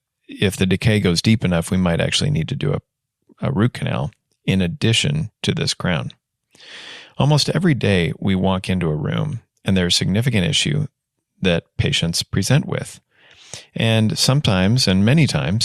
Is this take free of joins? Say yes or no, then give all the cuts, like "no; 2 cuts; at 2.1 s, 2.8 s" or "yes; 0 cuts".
yes; 0 cuts